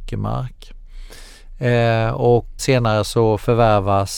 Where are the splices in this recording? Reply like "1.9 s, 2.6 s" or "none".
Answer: 2.6 s